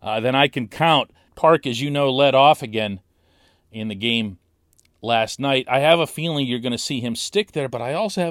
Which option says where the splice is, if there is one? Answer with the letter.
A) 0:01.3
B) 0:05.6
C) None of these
A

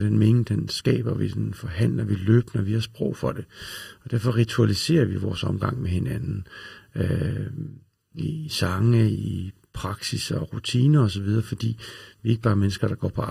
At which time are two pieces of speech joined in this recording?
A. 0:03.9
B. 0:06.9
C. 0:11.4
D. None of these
D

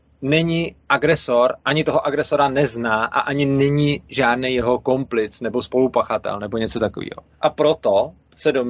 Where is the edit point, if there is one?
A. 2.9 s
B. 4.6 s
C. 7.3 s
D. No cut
C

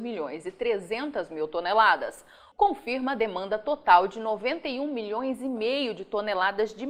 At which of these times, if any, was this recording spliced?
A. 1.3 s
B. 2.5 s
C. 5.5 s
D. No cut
B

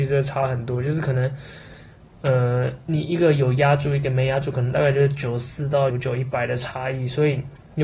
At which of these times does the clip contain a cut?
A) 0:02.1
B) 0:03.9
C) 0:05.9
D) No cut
C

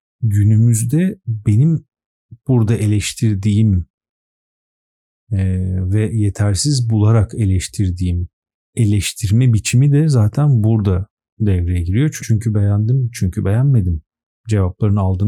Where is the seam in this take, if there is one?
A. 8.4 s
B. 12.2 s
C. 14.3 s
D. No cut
B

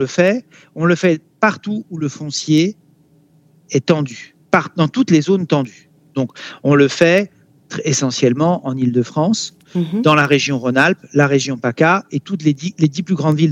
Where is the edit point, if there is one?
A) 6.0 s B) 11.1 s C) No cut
C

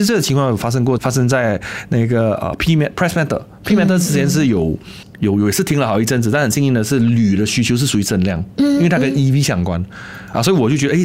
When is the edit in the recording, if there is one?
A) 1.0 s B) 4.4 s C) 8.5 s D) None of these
A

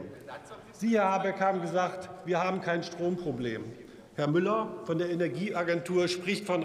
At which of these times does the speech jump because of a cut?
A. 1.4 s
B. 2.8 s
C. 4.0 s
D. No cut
D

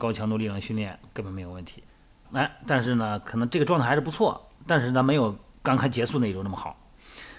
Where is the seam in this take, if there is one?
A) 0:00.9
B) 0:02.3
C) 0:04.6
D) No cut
B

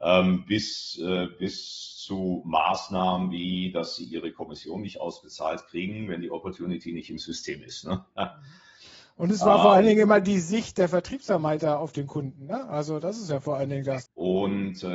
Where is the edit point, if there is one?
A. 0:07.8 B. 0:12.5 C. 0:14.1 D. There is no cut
C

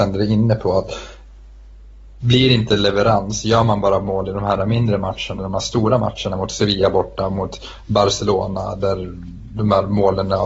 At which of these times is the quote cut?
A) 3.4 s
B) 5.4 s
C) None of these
B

